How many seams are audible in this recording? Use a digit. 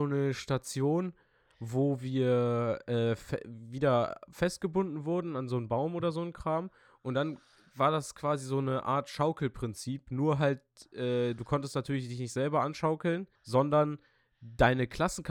1